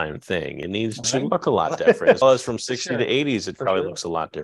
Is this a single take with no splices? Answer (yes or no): no